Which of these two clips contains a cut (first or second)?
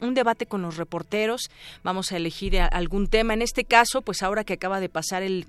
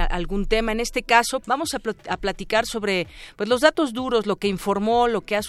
second